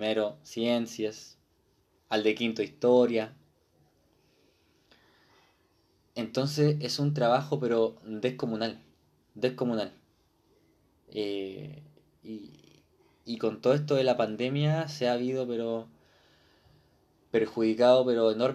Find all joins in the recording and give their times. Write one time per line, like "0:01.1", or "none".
none